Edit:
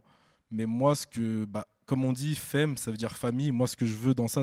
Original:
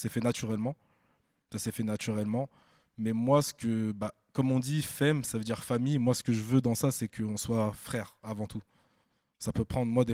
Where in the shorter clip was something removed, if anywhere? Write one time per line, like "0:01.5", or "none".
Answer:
none